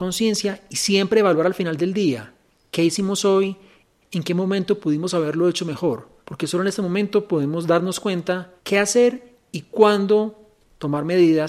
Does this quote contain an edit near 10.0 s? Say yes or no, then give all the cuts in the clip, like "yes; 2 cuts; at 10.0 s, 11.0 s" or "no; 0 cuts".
no; 3 cuts; at 4.0 s, 6.2 s, 8.6 s